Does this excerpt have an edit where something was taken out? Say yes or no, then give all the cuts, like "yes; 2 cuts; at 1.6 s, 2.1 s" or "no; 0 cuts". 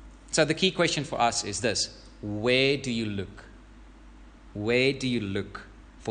no; 0 cuts